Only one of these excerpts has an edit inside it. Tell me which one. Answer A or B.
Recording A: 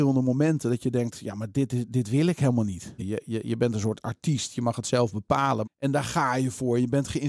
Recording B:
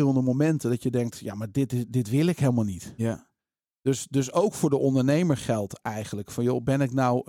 A